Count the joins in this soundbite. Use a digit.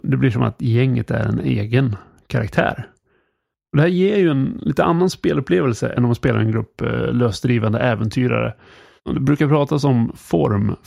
1